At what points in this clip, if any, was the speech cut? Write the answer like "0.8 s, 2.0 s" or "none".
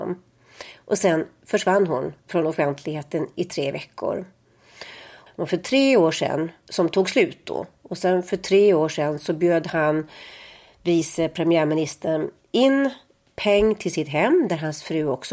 5.3 s